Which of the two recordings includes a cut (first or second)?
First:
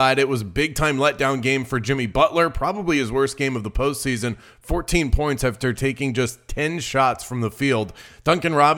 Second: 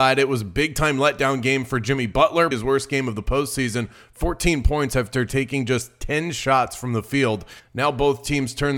second